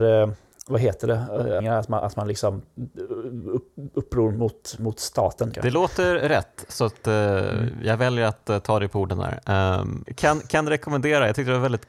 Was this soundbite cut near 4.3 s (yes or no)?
no